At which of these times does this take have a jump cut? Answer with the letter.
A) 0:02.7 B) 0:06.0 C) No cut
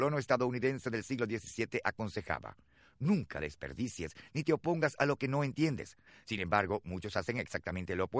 C